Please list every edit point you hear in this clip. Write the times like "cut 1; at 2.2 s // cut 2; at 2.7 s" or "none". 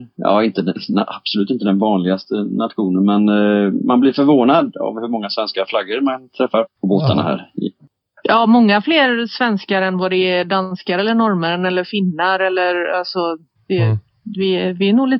cut 1; at 6.6 s